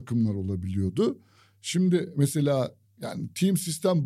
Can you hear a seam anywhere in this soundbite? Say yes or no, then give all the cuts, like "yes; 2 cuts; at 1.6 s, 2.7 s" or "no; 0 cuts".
no; 0 cuts